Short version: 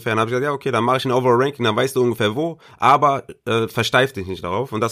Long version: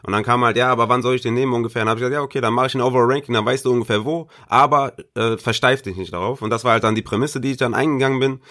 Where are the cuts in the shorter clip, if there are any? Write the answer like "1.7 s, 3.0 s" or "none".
none